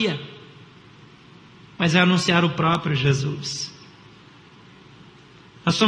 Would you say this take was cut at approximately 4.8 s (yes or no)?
no